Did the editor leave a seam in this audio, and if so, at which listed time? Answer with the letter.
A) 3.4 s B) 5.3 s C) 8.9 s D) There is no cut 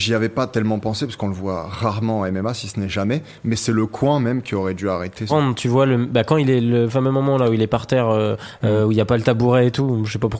B